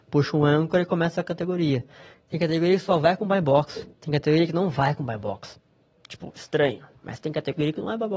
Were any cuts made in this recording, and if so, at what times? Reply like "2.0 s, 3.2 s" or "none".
2.1 s, 3.9 s